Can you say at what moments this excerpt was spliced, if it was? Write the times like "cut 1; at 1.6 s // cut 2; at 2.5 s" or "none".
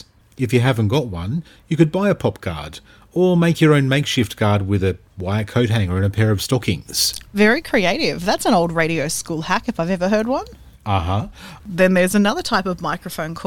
cut 1; at 11.6 s